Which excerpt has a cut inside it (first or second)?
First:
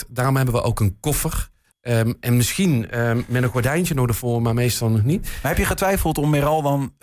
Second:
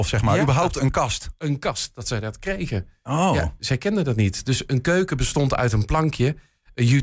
first